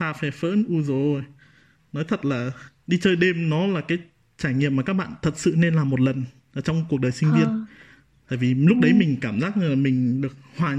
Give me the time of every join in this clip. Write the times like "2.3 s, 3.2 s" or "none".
none